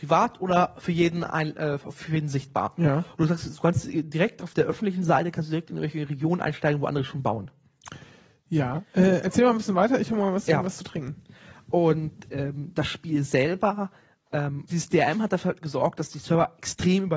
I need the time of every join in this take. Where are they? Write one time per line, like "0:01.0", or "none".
0:14.7